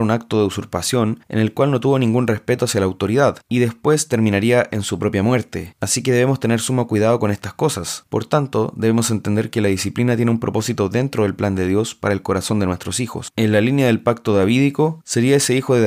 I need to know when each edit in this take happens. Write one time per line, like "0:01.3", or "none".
0:13.3